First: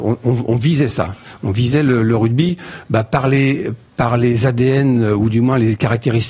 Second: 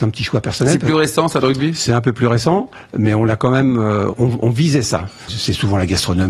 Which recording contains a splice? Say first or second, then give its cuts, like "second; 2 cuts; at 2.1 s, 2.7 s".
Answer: second; 2 cuts; at 4.1 s, 5.3 s